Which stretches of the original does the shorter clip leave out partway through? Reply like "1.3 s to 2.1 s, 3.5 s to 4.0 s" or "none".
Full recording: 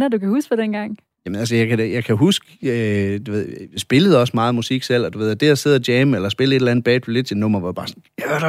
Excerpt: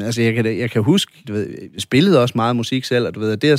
2.6 s to 3.2 s

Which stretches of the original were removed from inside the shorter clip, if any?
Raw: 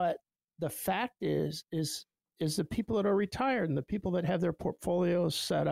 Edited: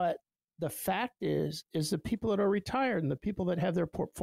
1.7 s to 2.3 s

